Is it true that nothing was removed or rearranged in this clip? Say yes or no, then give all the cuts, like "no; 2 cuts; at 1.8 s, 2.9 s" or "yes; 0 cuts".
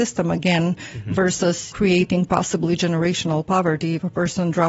no; 1 cut; at 1.7 s